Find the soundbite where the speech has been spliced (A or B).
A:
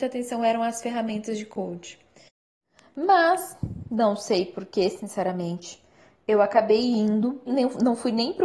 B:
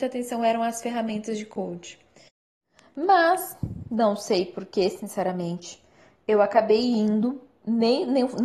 A